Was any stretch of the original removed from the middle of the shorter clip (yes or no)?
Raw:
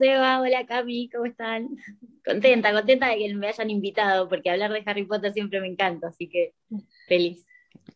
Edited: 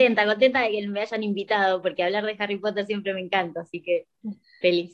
no